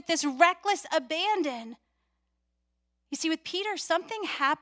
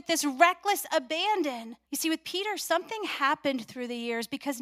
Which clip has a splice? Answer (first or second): second